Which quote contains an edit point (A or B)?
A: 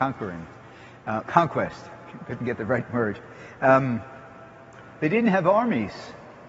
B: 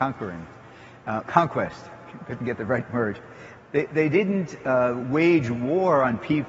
B